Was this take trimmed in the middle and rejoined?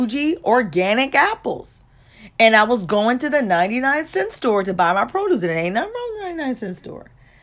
no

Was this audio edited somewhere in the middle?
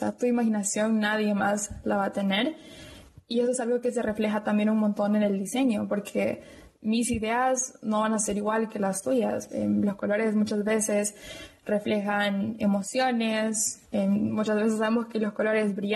yes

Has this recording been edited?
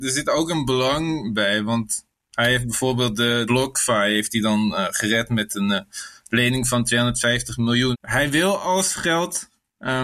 yes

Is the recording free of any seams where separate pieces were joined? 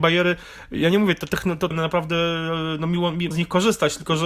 no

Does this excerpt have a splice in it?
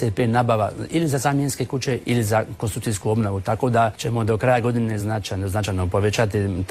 no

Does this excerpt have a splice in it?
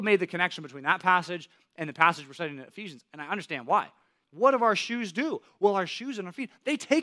yes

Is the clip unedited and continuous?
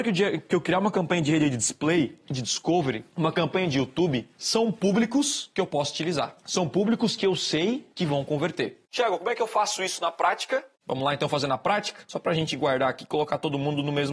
yes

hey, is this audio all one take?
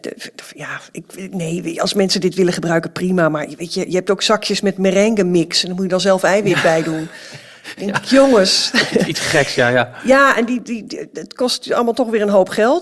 yes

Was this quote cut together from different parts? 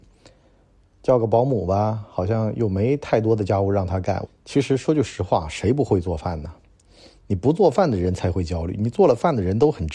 yes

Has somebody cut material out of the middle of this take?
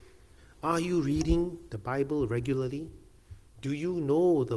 no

